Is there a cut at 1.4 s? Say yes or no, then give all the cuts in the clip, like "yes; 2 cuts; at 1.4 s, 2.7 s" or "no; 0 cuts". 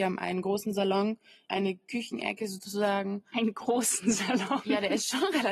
yes; 1 cut; at 1.4 s